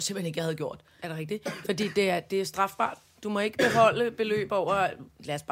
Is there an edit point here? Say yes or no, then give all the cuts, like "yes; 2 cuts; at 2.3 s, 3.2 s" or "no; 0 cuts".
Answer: no; 0 cuts